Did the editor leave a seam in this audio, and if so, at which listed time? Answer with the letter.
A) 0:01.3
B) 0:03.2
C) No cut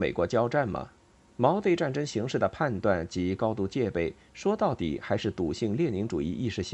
A